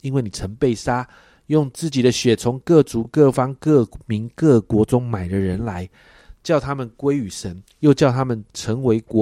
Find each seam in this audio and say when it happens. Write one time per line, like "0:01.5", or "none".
none